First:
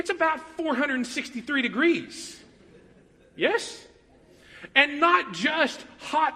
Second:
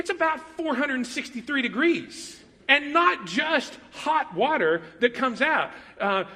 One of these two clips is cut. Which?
second; 1 cut; at 2.6 s

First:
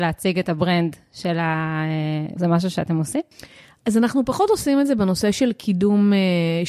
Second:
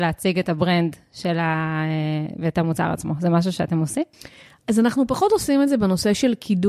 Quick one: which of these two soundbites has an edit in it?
first; 1 cut; at 2.4 s

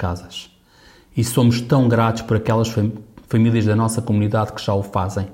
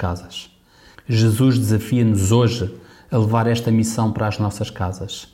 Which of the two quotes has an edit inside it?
second; 1 cut; at 0.9 s

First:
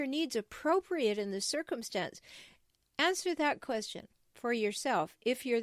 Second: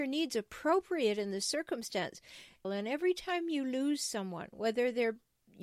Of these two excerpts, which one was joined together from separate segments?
second; 1 cut; at 2.6 s

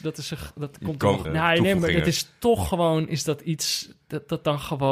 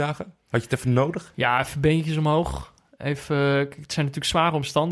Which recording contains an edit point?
first; 1 cut; at 1.2 s

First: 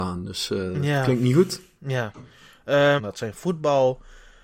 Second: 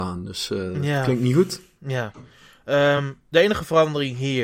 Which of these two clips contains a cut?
first; 1 cut; at 3.0 s

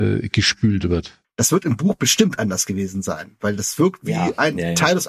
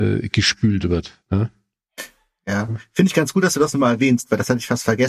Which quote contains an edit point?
first; 1 cut; at 1.2 s

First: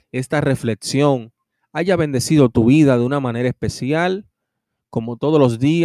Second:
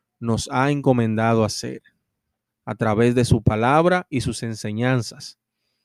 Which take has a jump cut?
second; 1 cut; at 2.5 s

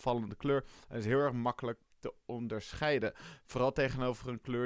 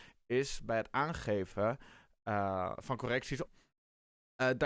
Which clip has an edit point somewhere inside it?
second; 1 cut; at 3.5 s

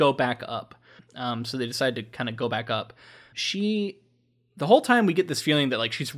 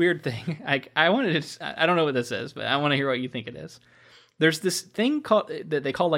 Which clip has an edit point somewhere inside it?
first; 2 cuts; at 1.0 s, 3.3 s

